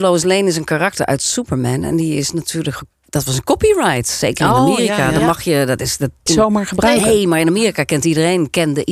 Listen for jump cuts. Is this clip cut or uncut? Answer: cut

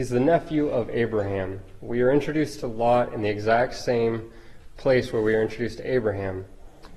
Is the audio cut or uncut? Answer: uncut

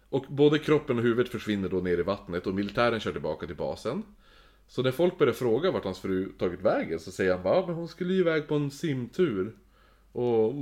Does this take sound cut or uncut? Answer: uncut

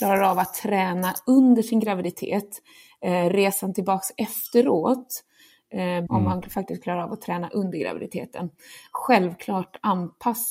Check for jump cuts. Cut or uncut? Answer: cut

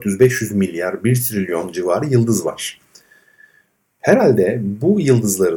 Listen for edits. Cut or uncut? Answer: uncut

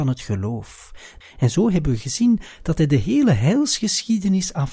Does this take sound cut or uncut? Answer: cut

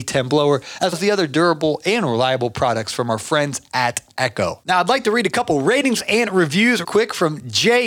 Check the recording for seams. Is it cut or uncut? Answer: cut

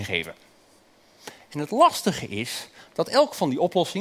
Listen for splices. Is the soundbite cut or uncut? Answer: uncut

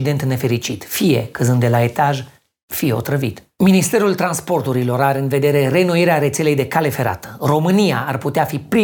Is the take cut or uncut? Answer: uncut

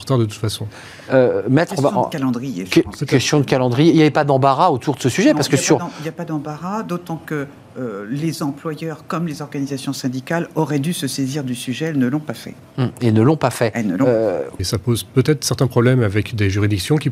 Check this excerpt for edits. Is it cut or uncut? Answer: cut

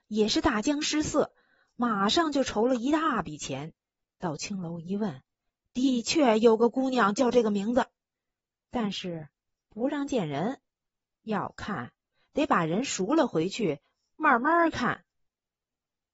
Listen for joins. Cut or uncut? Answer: uncut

